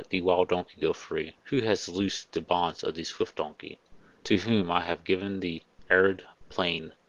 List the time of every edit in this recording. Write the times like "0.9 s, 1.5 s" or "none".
none